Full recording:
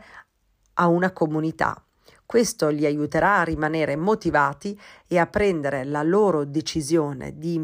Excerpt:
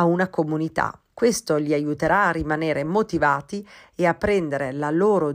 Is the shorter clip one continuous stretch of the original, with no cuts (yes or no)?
no